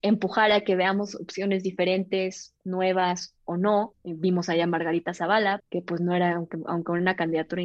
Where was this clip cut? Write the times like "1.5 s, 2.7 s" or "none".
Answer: 3.9 s, 5.6 s